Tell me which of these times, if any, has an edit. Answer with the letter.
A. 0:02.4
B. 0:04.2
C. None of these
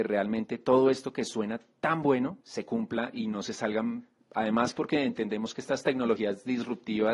A